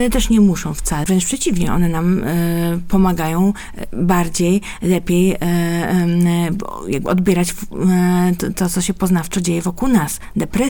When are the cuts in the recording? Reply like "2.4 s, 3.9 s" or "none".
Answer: 1.0 s

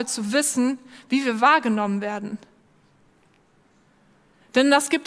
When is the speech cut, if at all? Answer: none

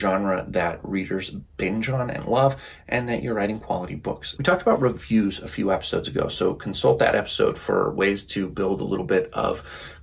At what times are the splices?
4.4 s

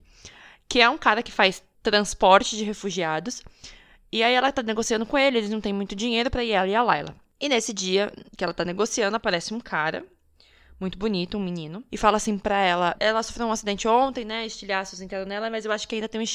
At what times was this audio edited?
11.9 s, 13.0 s

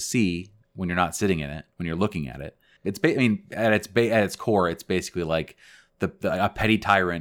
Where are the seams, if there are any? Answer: 2.8 s

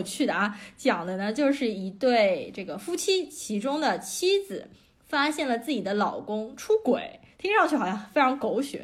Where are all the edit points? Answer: none

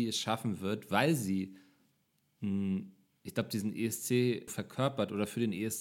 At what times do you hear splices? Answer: 4.5 s

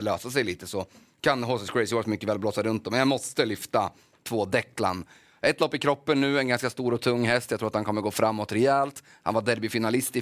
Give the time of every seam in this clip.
none

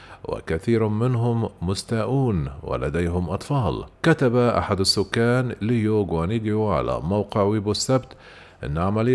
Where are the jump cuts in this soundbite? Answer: 3.9 s

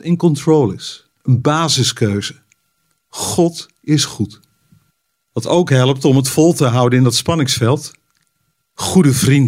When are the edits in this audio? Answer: 1.1 s

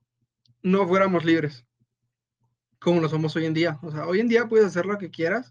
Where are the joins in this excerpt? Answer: none

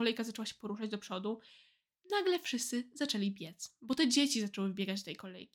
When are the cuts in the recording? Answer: none

